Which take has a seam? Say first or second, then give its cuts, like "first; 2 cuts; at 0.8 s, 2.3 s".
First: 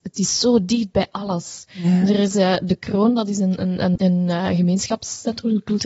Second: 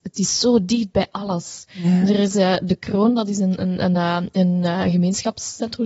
first; 1 cut; at 4.0 s